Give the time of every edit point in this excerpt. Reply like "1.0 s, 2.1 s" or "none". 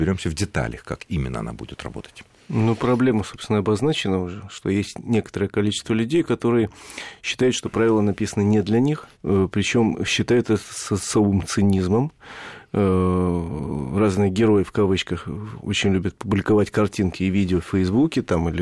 9.1 s